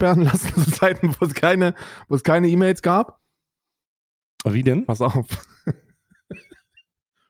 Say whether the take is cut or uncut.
uncut